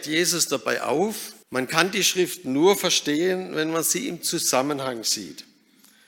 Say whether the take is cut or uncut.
cut